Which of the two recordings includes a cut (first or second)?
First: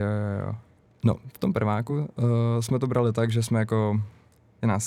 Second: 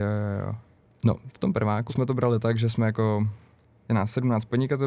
second